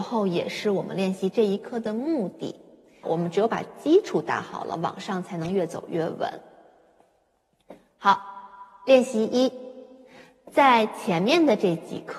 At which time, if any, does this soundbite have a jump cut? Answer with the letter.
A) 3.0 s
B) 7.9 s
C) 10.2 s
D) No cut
A